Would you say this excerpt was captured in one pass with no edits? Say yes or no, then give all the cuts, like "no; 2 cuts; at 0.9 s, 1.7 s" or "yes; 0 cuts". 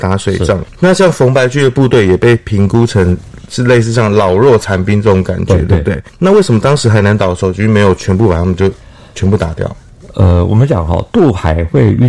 yes; 0 cuts